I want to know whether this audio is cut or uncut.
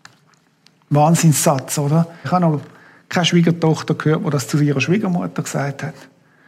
cut